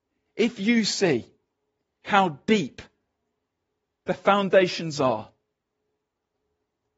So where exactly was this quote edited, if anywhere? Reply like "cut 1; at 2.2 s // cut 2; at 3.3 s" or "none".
none